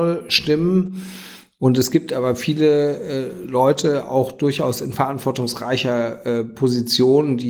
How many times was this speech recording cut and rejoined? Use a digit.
0